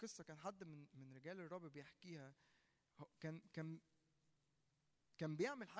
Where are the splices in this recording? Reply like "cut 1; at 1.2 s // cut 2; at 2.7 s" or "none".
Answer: none